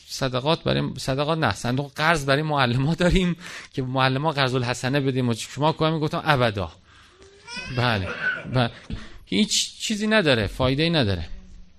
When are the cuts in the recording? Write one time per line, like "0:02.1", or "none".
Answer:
0:08.9